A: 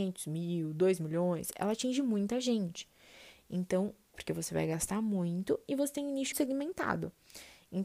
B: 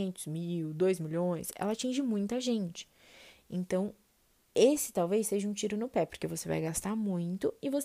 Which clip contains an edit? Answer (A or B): A